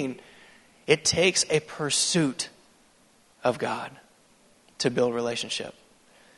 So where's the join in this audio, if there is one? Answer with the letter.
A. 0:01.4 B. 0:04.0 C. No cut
C